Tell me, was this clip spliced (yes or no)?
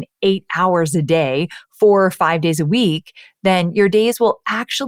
no